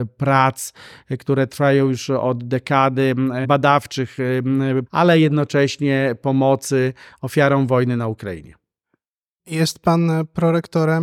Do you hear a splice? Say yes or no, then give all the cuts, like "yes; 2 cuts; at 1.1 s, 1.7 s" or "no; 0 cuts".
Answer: yes; 2 cuts; at 3.4 s, 4.9 s